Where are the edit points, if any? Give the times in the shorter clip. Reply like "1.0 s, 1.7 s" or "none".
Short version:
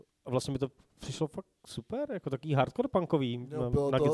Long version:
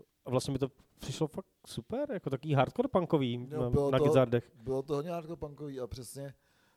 none